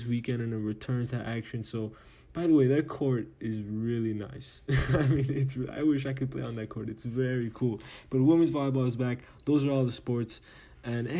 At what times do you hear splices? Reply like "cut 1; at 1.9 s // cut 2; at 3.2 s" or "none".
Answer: none